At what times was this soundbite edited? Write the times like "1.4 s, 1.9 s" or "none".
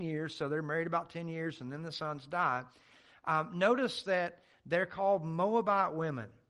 none